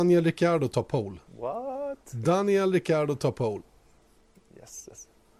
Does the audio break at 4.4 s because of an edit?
no; 0 cuts

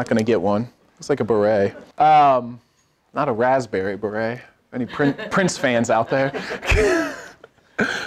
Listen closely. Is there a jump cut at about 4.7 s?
no; 1 cut; at 1.9 s

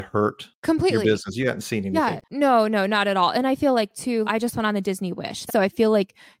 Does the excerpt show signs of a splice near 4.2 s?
yes; 2 cuts; at 4.2 s, 5.5 s

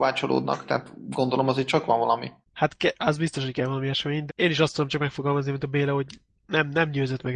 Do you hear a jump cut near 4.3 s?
yes; 2 cuts; at 2.4 s, 4.3 s

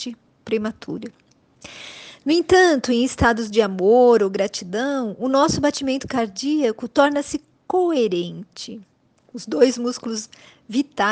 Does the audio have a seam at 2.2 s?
no; 1 cut; at 9.2 s

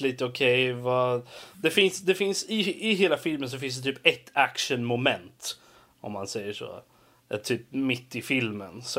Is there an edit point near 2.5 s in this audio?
no; 0 cuts

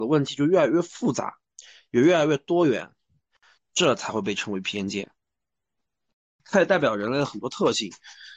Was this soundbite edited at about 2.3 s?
no; 2 cuts; at 3.6 s, 6.4 s

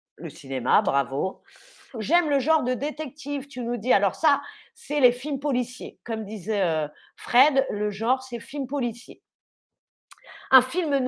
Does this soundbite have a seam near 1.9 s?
yes; 1 cut; at 1.9 s

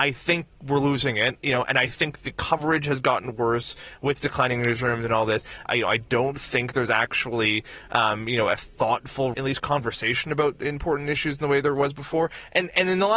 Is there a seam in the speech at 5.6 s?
yes; 2 cuts; at 5.6 s, 9.3 s

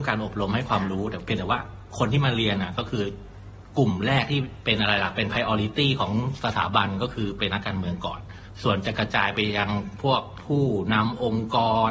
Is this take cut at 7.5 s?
yes; 1 cut; at 7.5 s

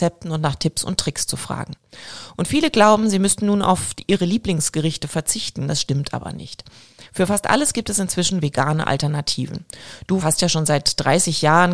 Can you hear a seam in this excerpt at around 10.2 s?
yes; 1 cut; at 10.2 s

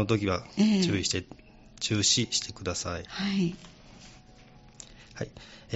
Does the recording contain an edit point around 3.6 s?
no; 0 cuts

